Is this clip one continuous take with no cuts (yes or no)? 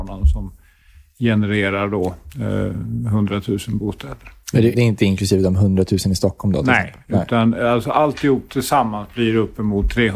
no